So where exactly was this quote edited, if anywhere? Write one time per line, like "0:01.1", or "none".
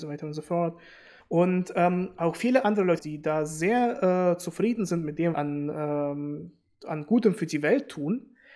0:01.2
0:03.0
0:05.3